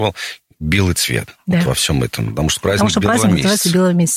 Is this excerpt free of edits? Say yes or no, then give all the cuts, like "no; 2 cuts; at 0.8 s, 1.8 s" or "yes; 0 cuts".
yes; 0 cuts